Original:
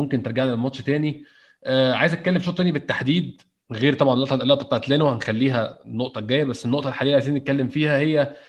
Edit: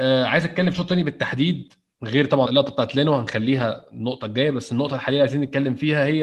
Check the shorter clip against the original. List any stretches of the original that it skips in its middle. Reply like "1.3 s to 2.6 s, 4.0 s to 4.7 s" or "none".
4.1 s to 4.4 s